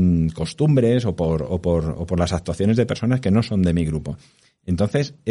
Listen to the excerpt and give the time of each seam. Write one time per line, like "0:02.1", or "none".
none